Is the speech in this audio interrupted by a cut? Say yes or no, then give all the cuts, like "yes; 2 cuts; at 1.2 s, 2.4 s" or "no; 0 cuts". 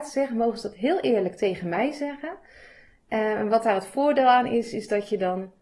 no; 0 cuts